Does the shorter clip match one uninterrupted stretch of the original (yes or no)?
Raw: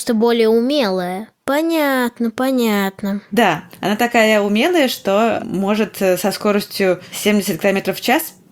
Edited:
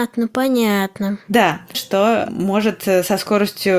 no